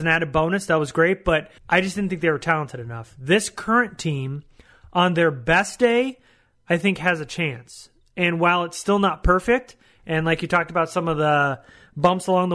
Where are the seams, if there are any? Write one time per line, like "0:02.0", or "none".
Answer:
0:01.6